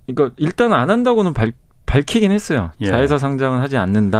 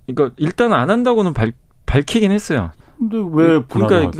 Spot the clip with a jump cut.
second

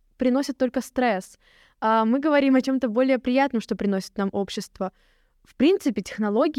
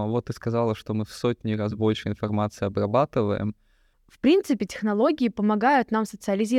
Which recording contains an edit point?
second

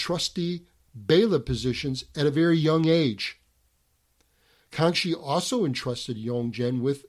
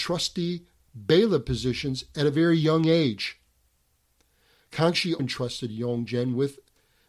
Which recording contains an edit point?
second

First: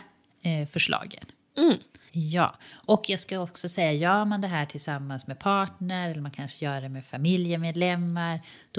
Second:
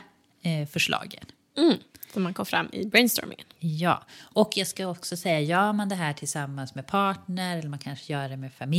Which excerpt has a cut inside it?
first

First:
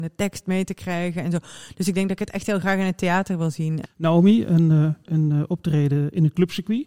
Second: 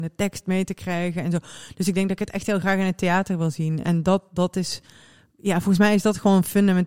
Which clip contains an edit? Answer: first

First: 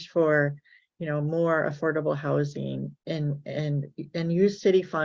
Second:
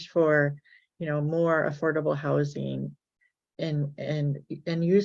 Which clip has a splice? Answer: first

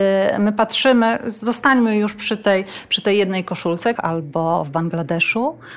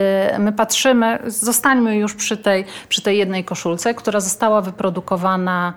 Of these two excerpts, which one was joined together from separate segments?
first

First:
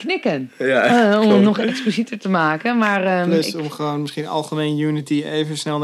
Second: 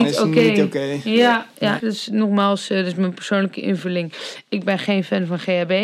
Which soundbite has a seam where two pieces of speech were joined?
second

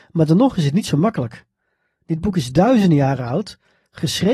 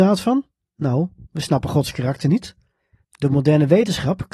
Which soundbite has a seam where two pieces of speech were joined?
second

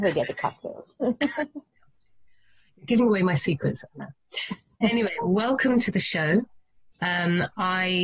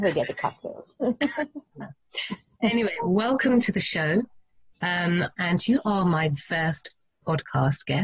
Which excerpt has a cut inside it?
second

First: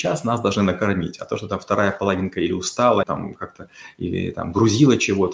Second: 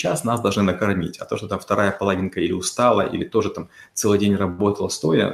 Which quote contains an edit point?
first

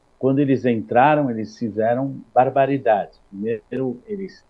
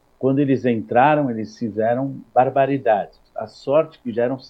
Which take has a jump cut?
second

